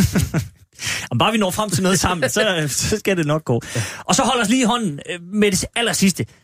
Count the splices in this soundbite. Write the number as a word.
zero